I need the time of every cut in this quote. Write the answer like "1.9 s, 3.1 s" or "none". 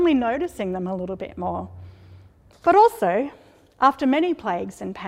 2.5 s